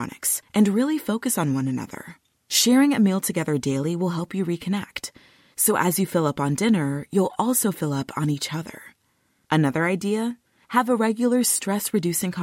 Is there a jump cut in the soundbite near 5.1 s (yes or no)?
no